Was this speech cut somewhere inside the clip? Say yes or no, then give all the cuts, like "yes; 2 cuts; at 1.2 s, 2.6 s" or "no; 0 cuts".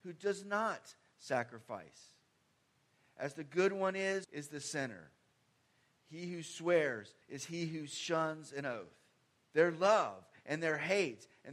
yes; 3 cuts; at 4.2 s, 7.2 s, 9.5 s